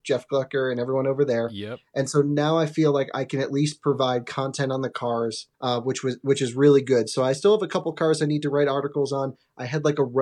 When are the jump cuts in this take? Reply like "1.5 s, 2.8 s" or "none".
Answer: 5.5 s